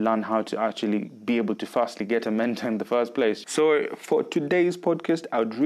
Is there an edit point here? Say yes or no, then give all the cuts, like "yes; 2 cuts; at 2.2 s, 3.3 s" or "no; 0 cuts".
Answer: yes; 1 cut; at 3.4 s